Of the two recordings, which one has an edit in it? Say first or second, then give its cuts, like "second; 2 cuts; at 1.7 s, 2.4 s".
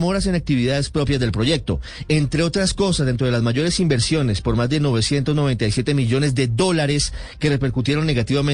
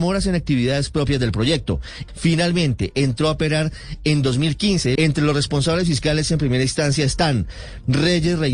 second; 2 cuts; at 2.1 s, 5.0 s